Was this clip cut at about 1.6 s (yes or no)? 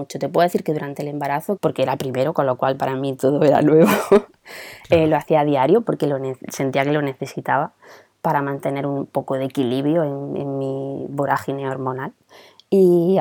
yes